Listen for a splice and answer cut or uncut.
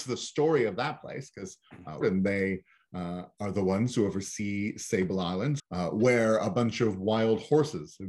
cut